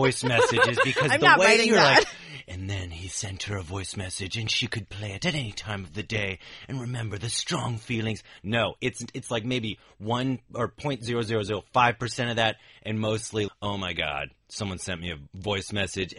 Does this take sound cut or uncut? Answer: cut